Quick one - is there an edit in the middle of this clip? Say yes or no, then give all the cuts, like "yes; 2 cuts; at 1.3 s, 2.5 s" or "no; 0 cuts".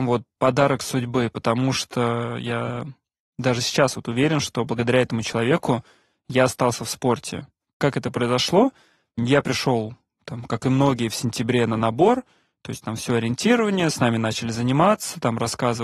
no; 0 cuts